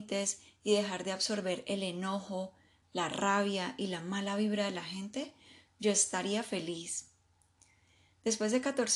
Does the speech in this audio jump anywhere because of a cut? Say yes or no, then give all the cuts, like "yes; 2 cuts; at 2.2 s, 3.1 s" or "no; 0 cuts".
no; 0 cuts